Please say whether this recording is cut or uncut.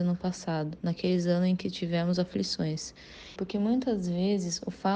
cut